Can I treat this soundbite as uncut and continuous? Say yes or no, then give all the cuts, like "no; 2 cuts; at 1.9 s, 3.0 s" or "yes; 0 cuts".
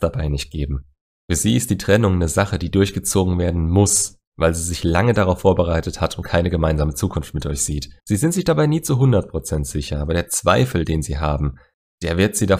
no; 1 cut; at 8.0 s